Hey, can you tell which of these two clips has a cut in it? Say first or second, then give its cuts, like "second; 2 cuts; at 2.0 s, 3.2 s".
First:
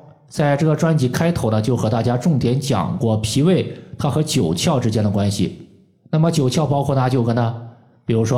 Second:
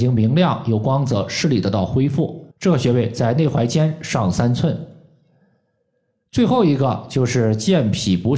second; 1 cut; at 2.5 s